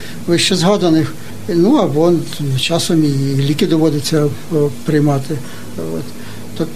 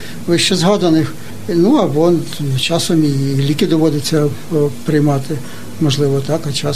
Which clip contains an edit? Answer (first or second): first